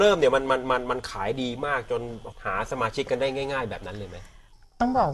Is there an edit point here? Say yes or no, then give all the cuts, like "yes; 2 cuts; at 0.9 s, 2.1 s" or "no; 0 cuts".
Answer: yes; 1 cut; at 2.3 s